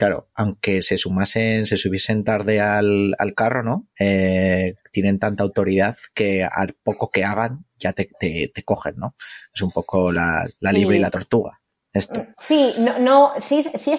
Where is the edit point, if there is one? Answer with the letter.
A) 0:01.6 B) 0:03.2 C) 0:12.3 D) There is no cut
D